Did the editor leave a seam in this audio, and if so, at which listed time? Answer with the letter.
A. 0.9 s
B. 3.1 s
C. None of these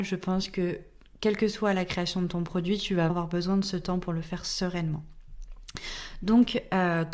B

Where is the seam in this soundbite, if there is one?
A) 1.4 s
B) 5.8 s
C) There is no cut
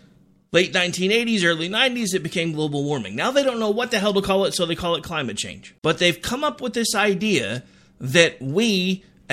B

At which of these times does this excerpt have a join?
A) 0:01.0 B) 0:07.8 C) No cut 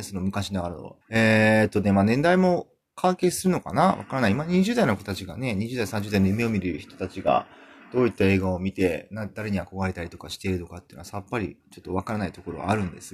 A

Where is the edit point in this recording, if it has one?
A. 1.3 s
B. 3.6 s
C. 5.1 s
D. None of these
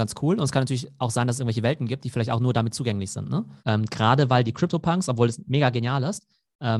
B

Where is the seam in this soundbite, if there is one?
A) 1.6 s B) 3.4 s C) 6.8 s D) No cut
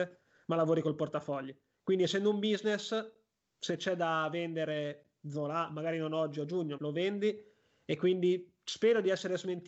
C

